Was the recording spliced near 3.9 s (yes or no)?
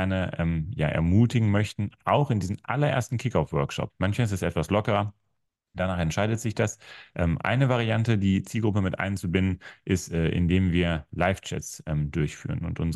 yes